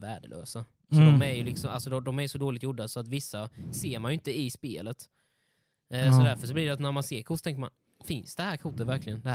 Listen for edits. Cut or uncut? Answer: uncut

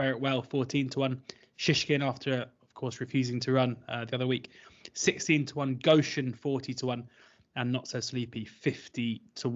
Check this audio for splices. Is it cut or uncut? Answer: uncut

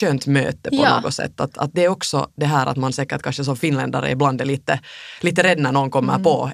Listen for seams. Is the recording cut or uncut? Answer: uncut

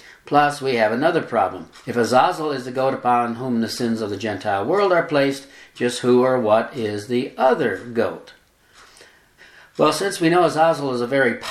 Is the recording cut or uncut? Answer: cut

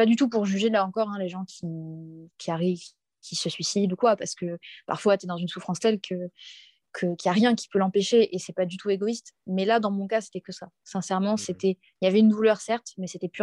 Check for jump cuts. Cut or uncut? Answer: uncut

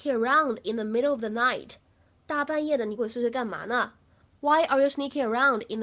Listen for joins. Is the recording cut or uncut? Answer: cut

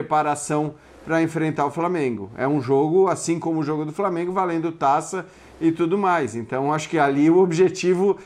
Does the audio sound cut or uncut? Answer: uncut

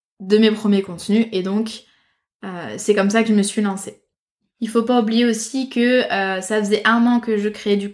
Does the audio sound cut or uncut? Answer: uncut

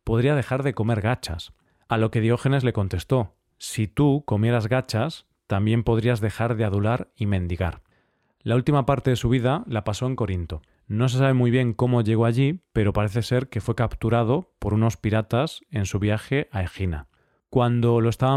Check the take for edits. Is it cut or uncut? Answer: uncut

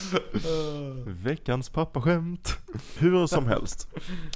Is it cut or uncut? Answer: cut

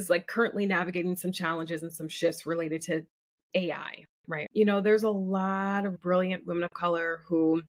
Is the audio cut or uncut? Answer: cut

